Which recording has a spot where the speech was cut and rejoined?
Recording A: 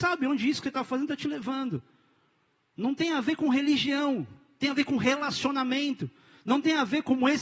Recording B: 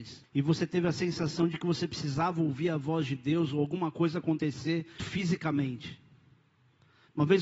B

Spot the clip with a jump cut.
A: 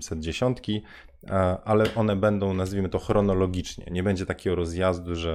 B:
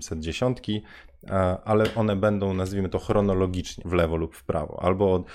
B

